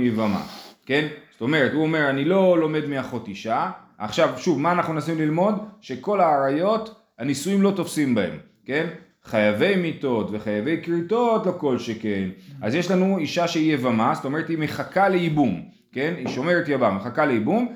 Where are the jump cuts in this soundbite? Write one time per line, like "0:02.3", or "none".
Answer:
0:09.1